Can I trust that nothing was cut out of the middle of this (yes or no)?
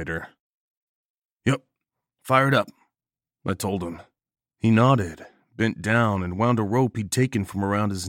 yes